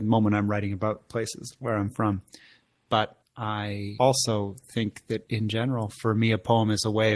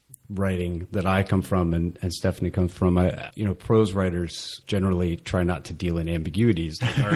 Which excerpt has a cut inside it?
second; 2 cuts; at 3.3 s, 4.6 s

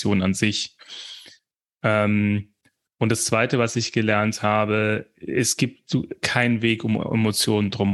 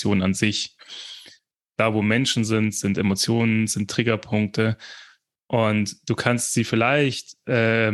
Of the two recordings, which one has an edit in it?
second; 2 cuts; at 1.7 s, 3.7 s

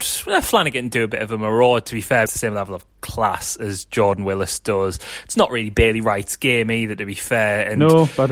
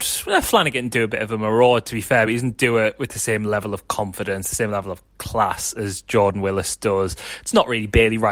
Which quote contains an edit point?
first; 1 cut; at 2.3 s

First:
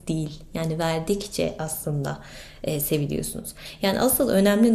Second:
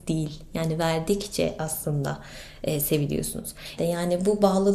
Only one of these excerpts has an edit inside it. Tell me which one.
second; 1 cut; at 3.8 s

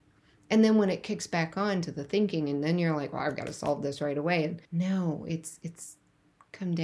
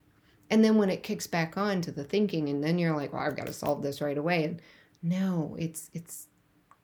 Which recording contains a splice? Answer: first; 1 cut; at 4.7 s

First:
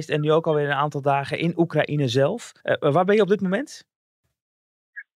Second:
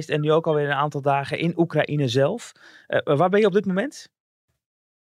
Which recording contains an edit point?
first; 1 cut; at 2.6 s

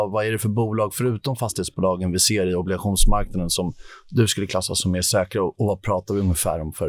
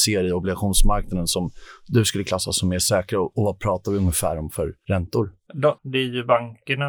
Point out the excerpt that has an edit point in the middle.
second; 1 cut; at 5.8 s

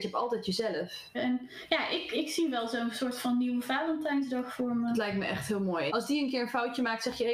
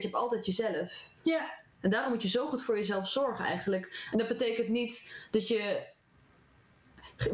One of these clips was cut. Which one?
first; 2 cuts; at 1.1 s, 5.9 s

